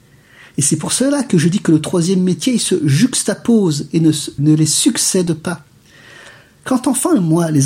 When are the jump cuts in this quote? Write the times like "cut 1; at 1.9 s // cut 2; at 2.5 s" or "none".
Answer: none